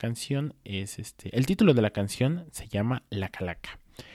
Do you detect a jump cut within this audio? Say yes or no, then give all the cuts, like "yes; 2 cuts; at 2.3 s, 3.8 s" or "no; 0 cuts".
no; 0 cuts